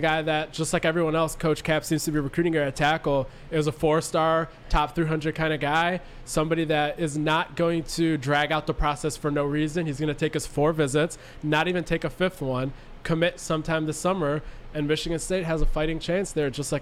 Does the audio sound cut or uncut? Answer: uncut